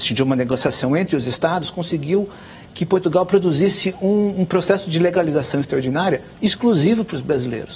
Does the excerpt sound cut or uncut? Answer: uncut